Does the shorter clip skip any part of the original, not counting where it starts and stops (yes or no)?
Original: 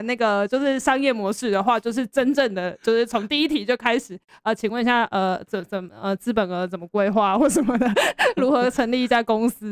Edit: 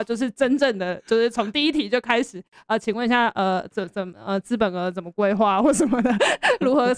no